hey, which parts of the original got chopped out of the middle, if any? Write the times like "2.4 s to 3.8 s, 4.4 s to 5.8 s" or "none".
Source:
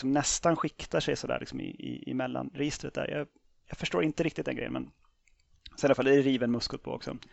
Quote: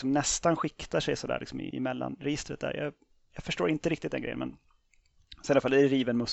1.7 s to 2.0 s